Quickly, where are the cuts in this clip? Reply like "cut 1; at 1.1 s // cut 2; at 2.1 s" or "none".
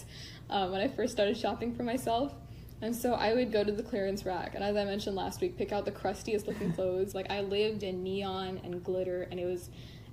cut 1; at 3.5 s // cut 2; at 7.1 s